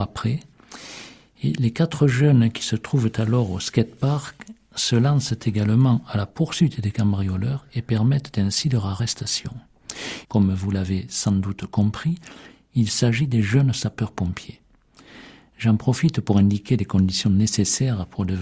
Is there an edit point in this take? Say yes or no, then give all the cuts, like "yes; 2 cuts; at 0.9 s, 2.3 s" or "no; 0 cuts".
yes; 1 cut; at 10.2 s